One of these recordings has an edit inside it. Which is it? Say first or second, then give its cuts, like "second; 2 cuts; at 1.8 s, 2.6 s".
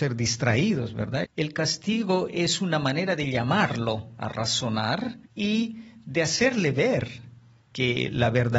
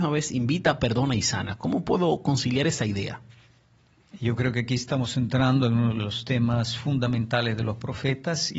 first; 2 cuts; at 1.2 s, 5.3 s